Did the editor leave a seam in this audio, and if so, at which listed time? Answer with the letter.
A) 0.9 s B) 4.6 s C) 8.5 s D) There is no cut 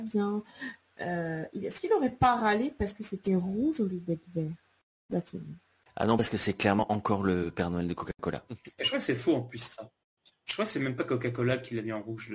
D